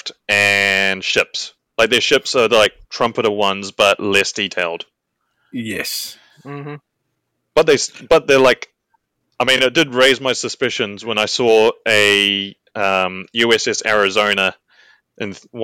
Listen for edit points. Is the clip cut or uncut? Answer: uncut